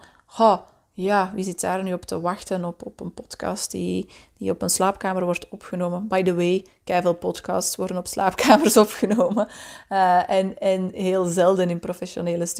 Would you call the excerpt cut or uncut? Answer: uncut